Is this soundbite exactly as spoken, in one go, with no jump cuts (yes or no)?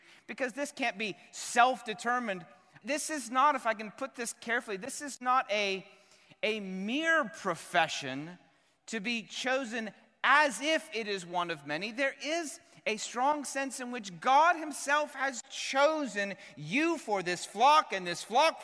no